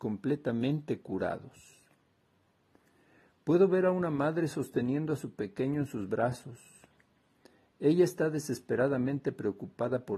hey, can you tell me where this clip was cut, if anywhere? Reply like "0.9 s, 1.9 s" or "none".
none